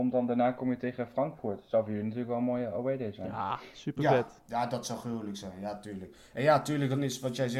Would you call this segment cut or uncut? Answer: uncut